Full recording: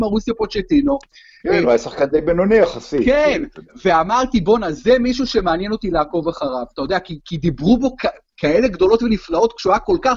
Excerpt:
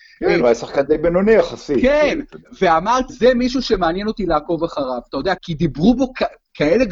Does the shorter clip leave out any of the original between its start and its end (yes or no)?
yes